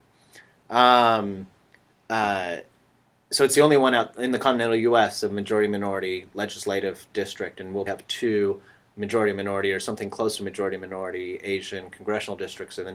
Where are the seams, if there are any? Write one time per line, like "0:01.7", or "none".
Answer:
0:07.9